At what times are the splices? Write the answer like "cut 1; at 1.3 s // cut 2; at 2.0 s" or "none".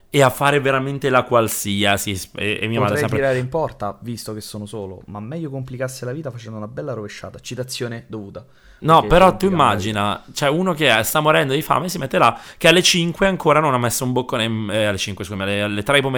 none